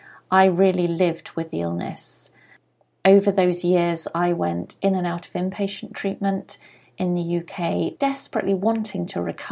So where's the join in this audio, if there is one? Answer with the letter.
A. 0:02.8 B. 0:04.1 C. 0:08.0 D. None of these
C